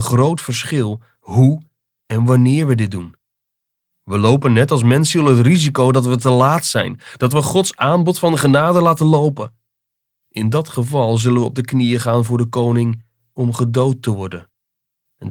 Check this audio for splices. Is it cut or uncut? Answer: uncut